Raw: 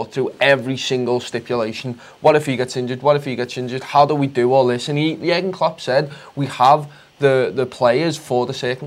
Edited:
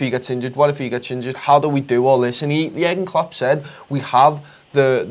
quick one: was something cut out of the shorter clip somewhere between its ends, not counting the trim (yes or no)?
no